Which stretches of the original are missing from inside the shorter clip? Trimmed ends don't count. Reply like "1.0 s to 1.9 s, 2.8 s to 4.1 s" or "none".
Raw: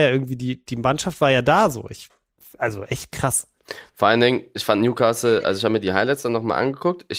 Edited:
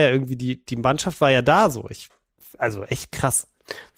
none